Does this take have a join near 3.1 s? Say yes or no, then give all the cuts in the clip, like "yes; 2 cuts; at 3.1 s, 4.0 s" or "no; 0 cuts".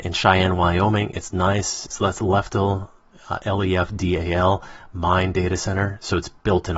no; 1 cut; at 1.9 s